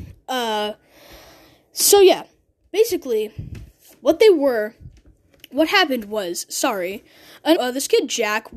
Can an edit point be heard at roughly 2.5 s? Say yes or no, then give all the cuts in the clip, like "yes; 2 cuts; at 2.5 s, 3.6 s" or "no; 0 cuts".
no; 1 cut; at 7.6 s